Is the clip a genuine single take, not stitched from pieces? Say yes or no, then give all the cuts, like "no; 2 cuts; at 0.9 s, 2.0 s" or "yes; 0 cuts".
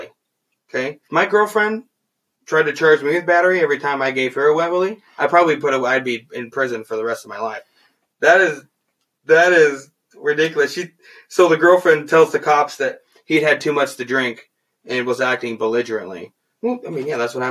no; 1 cut; at 1.0 s